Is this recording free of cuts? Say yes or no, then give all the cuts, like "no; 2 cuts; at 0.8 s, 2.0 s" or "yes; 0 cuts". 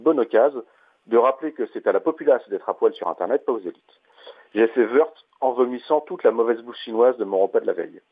yes; 0 cuts